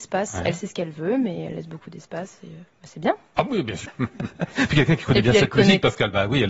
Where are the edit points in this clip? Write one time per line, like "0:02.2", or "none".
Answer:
0:02.7
0:03.9